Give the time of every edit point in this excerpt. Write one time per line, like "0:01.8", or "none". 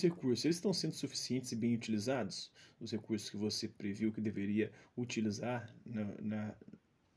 none